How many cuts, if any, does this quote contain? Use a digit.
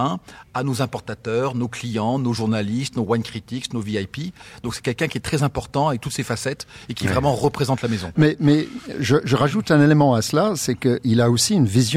1